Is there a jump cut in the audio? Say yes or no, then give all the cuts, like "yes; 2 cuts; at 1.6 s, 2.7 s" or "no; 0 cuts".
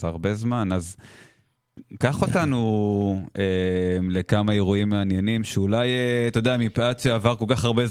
no; 0 cuts